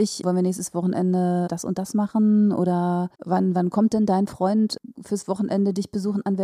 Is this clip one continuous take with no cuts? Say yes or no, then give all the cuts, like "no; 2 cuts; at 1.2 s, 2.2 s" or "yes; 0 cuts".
no; 1 cut; at 3.1 s